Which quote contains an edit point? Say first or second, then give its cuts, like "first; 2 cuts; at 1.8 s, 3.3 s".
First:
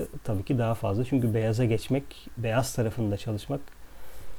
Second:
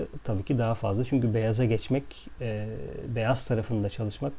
first; 1 cut; at 2.4 s